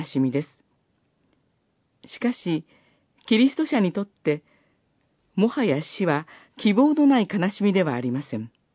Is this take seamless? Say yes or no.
yes